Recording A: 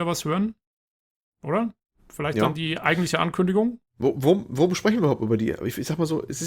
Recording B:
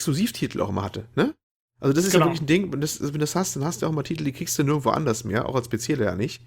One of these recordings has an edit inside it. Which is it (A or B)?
A